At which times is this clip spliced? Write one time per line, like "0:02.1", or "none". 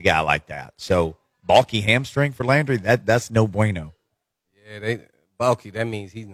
none